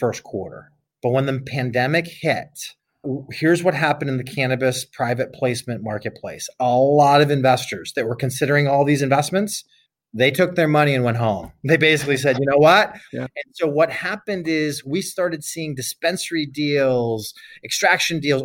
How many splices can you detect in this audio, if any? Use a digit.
1